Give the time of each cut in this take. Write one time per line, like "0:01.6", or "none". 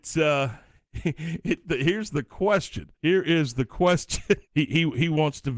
0:02.9
0:04.4